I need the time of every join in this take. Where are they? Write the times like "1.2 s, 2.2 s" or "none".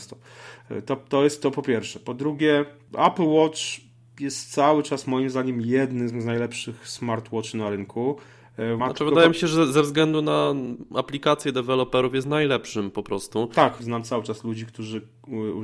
8.8 s, 13.8 s